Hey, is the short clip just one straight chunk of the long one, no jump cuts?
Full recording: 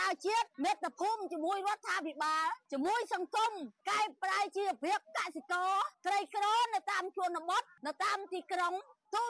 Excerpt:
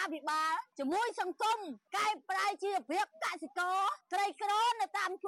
yes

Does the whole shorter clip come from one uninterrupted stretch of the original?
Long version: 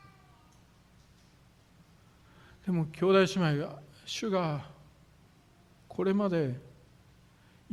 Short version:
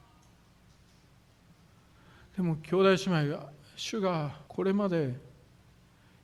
no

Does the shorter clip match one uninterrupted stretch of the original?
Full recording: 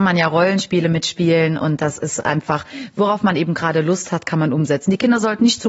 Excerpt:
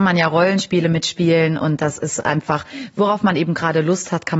yes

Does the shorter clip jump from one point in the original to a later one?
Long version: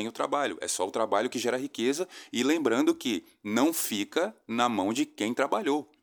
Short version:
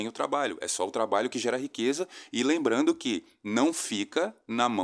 no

